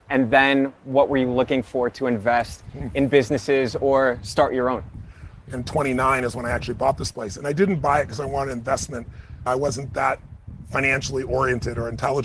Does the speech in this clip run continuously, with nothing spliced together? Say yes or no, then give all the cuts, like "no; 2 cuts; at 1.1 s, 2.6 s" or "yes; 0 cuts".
no; 1 cut; at 5.4 s